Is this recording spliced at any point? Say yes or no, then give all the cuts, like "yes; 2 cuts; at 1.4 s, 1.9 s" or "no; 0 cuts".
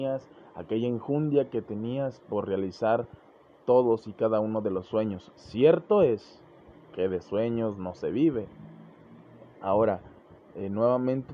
yes; 1 cut; at 9.5 s